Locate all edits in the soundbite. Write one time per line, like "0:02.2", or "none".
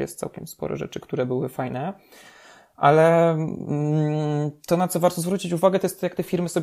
none